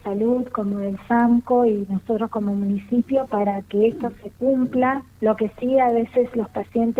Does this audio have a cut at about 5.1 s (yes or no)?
yes